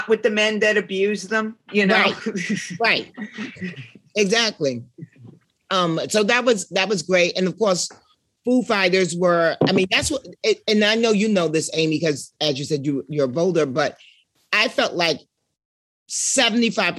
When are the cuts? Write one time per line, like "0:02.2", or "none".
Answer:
none